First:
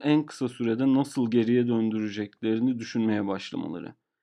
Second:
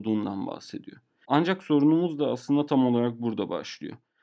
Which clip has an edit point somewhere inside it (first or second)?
second